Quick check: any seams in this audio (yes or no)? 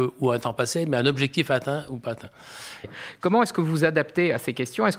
yes